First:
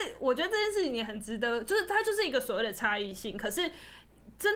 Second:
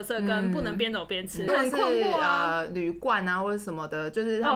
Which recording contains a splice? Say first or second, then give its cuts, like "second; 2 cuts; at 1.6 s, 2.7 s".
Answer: second; 1 cut; at 1.5 s